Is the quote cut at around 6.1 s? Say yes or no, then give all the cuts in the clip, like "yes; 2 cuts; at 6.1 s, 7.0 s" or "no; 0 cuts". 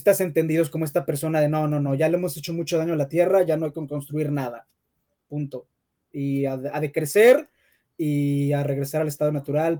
no; 0 cuts